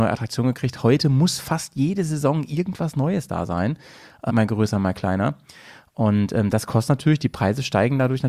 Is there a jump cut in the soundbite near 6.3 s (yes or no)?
no